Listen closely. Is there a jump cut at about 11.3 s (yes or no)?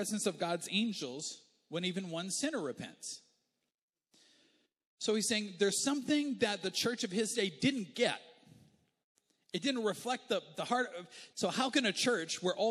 yes